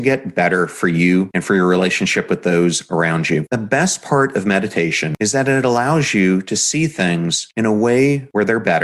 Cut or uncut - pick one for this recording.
uncut